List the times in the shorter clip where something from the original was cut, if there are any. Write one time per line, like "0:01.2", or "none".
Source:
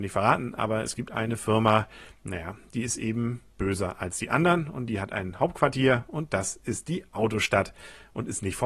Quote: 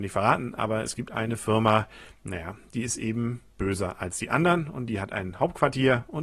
none